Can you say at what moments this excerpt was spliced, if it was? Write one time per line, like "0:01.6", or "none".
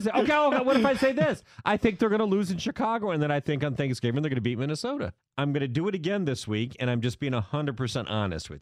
0:05.2